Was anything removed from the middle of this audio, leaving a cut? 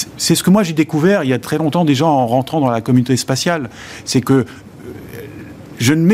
no; 0 cuts

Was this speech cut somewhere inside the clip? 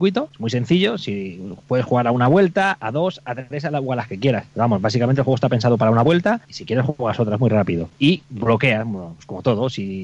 no; 0 cuts

